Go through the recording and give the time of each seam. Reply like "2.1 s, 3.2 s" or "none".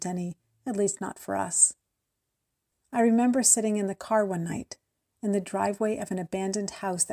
none